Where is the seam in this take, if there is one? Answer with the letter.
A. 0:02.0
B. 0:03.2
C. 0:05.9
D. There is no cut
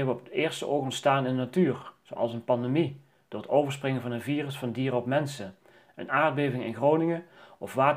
D